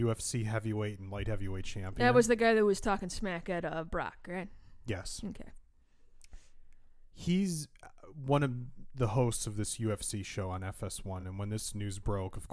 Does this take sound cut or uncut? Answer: uncut